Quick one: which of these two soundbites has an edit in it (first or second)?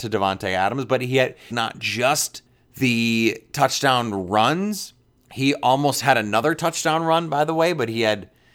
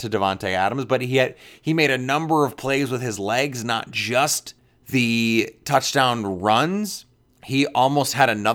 first